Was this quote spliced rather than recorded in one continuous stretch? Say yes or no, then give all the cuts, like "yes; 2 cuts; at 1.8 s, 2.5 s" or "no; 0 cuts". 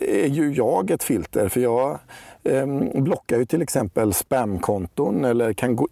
no; 0 cuts